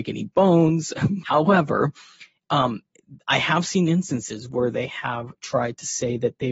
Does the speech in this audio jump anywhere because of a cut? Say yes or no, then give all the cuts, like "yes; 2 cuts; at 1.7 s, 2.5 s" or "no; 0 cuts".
yes; 1 cut; at 1.2 s